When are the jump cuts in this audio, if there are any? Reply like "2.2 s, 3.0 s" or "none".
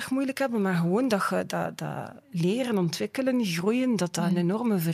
2.2 s